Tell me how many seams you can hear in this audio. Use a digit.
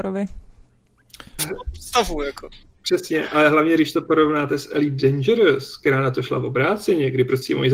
1